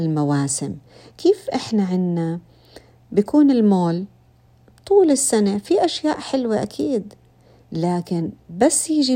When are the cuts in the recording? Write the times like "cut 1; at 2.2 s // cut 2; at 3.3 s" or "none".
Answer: none